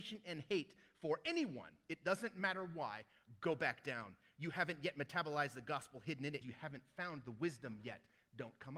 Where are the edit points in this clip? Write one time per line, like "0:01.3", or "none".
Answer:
0:06.4